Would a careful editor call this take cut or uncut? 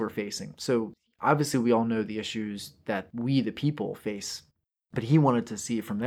uncut